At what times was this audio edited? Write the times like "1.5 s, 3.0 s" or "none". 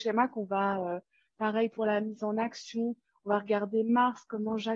1.3 s